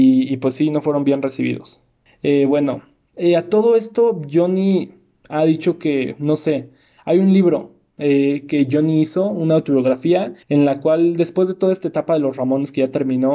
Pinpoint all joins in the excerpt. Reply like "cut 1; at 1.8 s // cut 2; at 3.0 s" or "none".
cut 1; at 2.1 s // cut 2; at 10.4 s